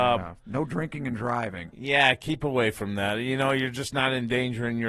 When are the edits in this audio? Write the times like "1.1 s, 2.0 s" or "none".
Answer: none